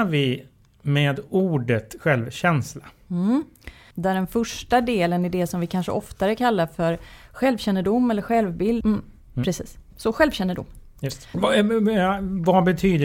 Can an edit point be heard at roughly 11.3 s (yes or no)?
yes